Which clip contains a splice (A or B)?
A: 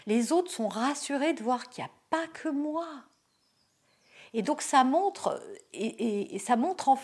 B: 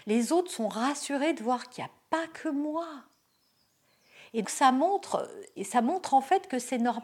B